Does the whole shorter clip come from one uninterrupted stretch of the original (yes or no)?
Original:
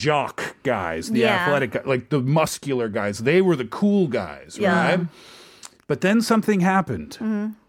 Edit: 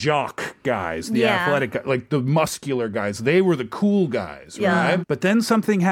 no